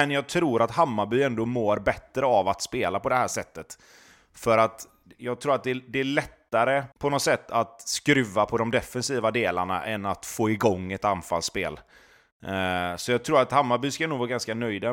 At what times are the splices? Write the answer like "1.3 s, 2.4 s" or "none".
6.9 s